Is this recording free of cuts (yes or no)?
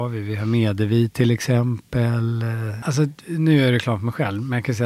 no